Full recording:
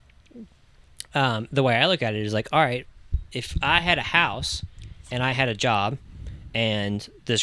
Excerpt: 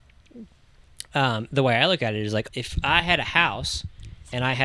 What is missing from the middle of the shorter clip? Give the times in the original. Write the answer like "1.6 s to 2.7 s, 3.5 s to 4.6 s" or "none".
2.5 s to 3.3 s